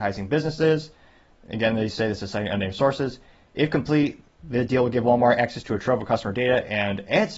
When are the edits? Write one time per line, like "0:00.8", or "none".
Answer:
none